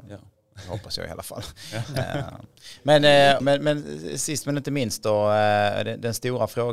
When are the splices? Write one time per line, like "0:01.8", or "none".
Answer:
0:03.4